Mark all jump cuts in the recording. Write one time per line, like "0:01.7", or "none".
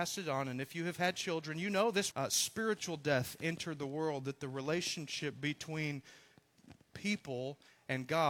0:02.1